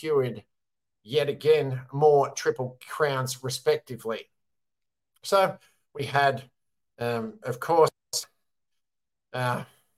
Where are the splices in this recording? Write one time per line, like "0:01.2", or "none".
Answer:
none